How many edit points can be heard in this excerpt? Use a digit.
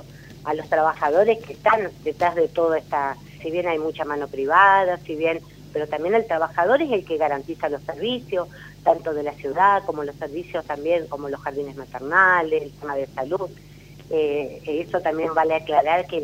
2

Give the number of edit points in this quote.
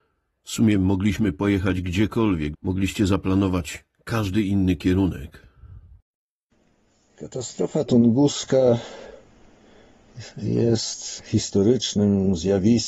1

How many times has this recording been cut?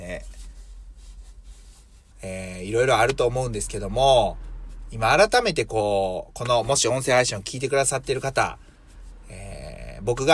1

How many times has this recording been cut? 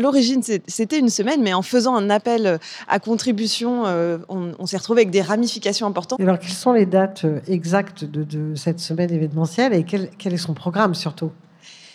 1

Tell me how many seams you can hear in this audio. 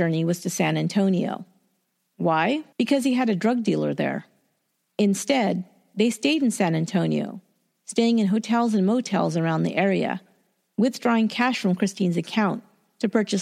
2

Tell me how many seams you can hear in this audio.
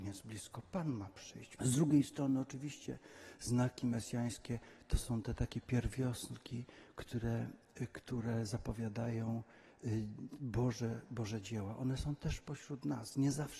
1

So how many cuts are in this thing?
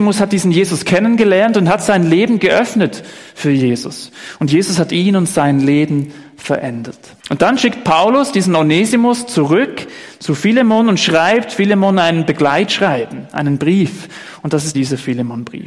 2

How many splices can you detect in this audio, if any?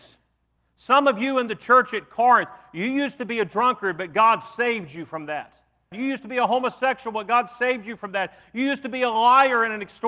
1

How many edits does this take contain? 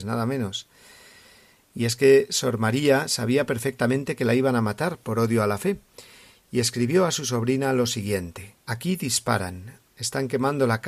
2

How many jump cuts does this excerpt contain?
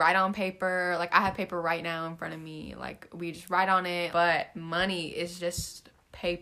1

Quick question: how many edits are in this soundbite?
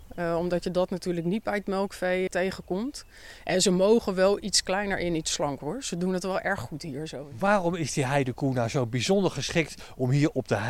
1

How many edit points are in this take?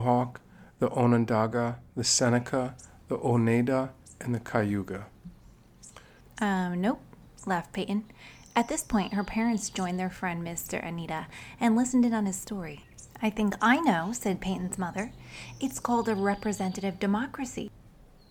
1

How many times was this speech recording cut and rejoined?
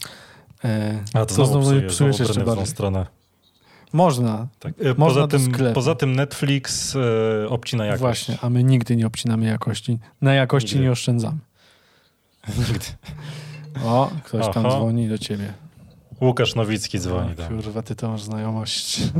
0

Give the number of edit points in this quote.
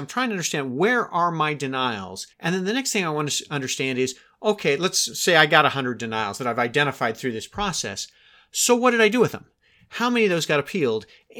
1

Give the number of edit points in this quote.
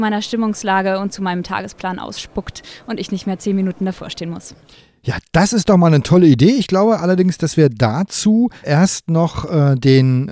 1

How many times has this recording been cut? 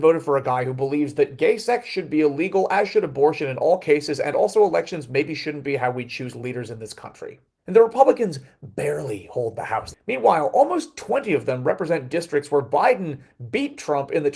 2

